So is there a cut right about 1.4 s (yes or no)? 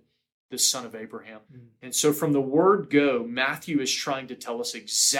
yes